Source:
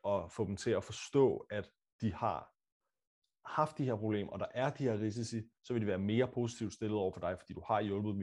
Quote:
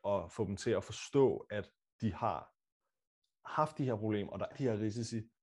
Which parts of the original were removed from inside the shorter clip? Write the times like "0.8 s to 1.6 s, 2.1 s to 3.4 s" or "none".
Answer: 4.5 s to 4.7 s